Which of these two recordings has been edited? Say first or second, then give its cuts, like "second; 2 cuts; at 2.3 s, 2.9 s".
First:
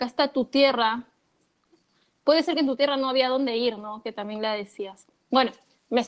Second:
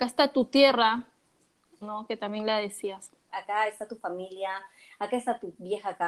second; 2 cuts; at 1.8 s, 3.3 s